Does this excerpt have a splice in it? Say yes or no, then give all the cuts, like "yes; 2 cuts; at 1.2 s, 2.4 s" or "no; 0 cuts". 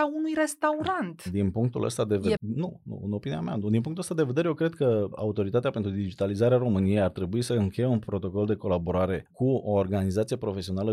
yes; 1 cut; at 2.4 s